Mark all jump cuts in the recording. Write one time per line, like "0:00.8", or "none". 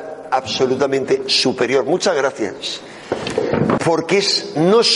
0:03.8